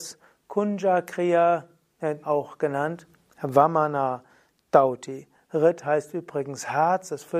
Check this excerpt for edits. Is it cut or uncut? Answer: cut